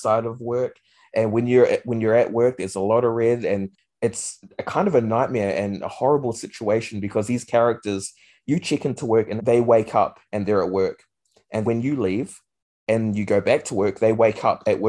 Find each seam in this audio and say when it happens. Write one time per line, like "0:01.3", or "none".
0:09.4
0:11.6